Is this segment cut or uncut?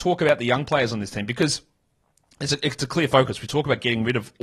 uncut